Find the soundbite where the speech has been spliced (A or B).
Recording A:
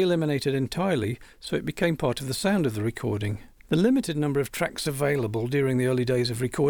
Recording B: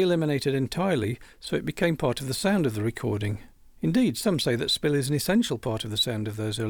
A